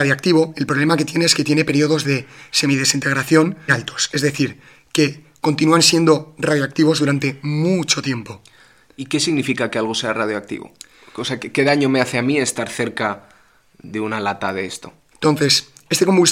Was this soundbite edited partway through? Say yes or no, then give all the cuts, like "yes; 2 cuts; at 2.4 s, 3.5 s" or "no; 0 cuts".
yes; 2 cuts; at 3.7 s, 15.1 s